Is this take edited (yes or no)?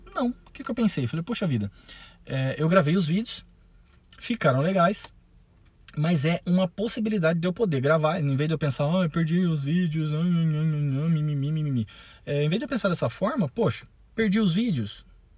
no